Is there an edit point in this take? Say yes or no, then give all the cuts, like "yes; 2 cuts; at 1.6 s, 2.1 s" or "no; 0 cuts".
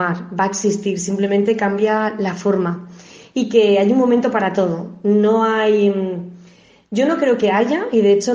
no; 0 cuts